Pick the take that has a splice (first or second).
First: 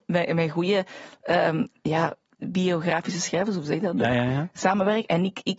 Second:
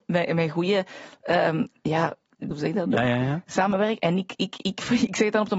second